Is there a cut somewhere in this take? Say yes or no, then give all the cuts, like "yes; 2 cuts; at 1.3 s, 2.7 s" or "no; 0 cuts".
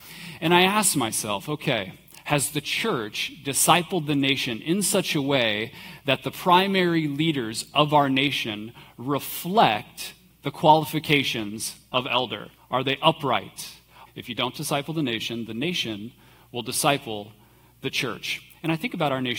yes; 2 cuts; at 12.6 s, 14.1 s